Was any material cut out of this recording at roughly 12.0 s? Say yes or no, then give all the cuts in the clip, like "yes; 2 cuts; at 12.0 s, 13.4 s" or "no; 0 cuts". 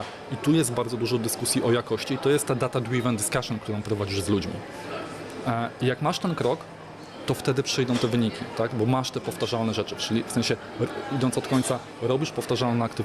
no; 0 cuts